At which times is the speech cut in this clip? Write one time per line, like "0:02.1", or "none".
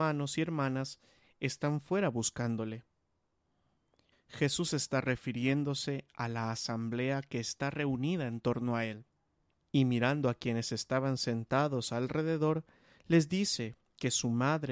0:04.1
0:09.5

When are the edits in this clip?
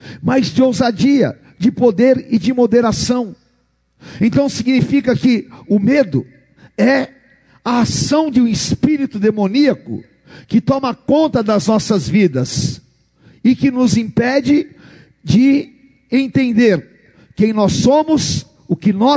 none

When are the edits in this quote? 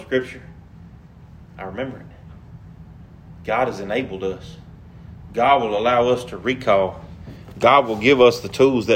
none

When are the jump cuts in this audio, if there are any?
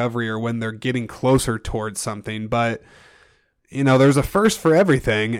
none

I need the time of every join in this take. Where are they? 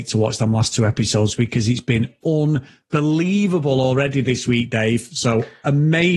none

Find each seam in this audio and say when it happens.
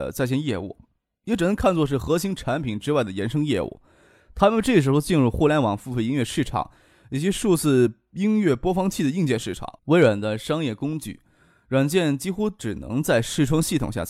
0:09.8

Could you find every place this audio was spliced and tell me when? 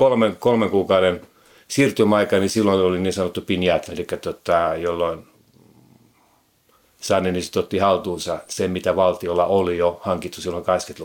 0:03.9

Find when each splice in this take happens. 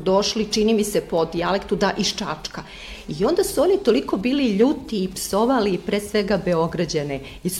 none

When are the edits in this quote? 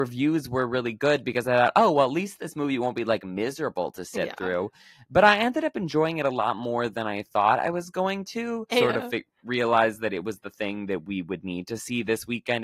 0:08.7

